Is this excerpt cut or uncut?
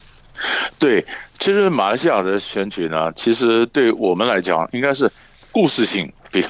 uncut